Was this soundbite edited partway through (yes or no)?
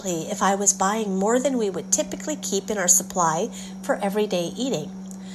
no